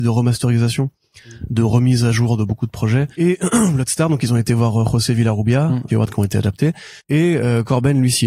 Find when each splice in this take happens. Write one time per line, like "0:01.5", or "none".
0:03.1
0:05.9
0:07.0

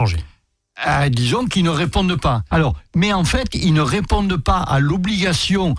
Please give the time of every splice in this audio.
0:02.5

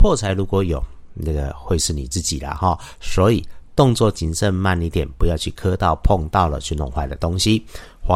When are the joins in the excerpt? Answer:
none

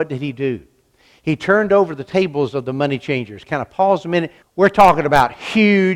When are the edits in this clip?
0:04.4

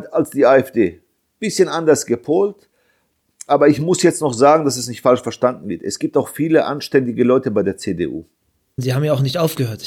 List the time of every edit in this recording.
0:08.8

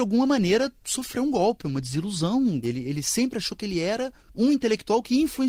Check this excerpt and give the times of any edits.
0:02.6

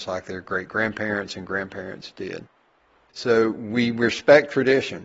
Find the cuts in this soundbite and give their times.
0:03.1

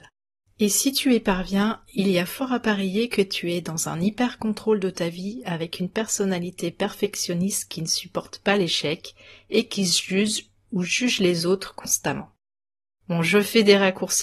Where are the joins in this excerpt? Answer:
none

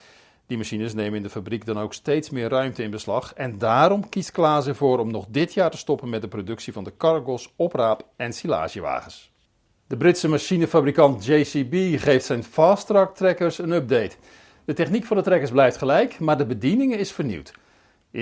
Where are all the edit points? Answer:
none

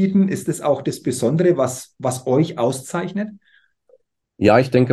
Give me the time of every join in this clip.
none

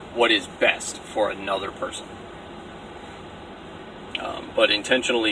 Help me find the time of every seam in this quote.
0:04.1

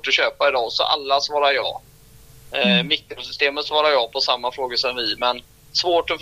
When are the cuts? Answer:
none

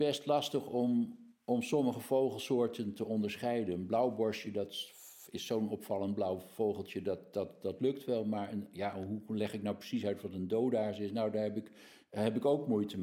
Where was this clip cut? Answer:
none

